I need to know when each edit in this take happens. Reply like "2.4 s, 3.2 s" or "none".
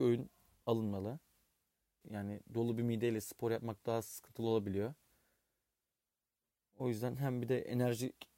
2.0 s